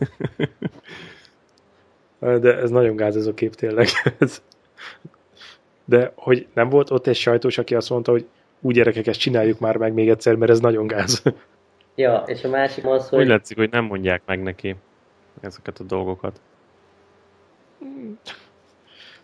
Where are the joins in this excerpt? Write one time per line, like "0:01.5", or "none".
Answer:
0:12.8